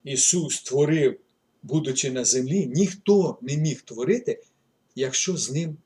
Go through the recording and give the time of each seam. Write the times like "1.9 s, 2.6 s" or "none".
none